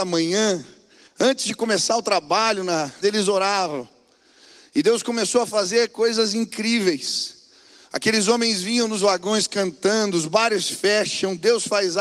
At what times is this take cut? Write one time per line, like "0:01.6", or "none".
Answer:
0:03.0